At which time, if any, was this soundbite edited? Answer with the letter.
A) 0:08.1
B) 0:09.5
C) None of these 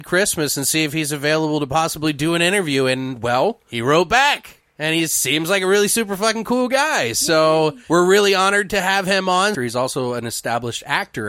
B